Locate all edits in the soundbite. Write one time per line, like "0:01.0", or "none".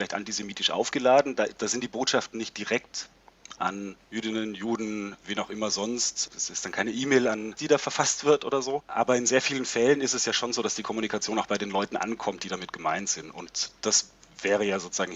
0:07.6